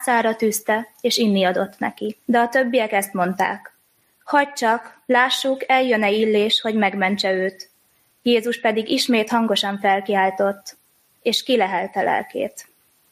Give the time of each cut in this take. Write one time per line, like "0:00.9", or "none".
0:02.2